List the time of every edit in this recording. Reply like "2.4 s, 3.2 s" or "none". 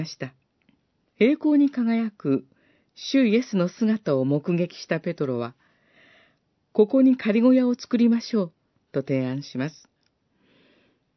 1.0 s